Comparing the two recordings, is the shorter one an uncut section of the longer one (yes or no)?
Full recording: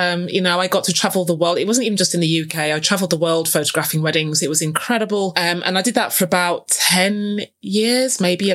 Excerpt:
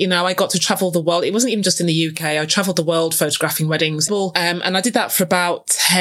no